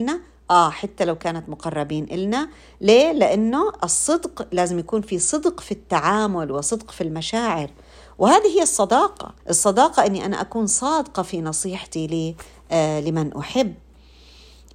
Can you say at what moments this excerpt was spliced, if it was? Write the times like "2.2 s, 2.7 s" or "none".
9.4 s